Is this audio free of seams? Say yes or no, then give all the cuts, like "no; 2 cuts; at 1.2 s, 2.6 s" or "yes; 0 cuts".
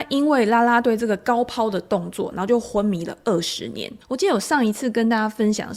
no; 2 cuts; at 2.3 s, 4.0 s